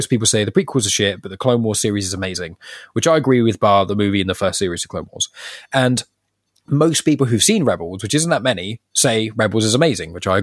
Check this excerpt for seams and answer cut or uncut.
uncut